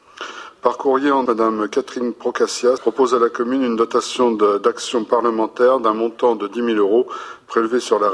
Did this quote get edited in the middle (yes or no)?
yes